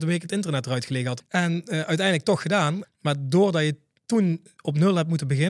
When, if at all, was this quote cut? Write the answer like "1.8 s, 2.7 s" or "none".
1.2 s, 2.8 s